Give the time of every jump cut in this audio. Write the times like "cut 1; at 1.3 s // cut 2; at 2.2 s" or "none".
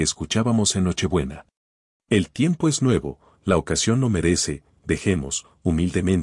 cut 1; at 1.9 s